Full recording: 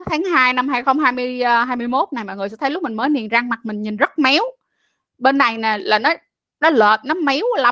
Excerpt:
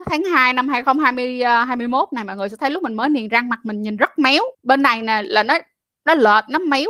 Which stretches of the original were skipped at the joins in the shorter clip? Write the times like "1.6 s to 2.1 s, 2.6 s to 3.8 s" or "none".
4.5 s to 5.1 s